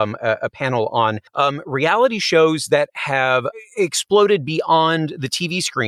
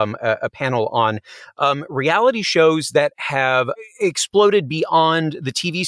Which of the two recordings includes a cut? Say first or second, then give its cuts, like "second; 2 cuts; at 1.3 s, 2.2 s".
first; 1 cut; at 1.3 s